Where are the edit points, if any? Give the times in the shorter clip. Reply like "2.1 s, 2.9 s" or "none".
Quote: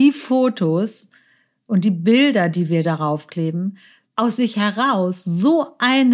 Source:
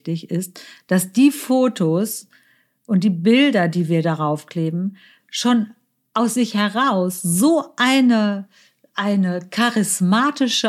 4.0 s